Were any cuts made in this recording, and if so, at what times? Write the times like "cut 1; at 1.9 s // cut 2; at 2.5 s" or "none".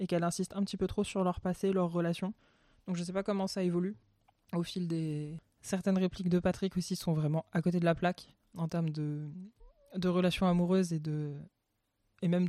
cut 1; at 5.4 s // cut 2; at 8.5 s